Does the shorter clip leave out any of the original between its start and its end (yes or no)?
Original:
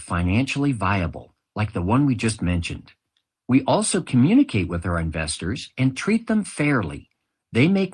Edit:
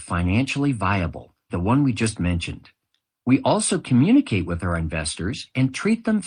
yes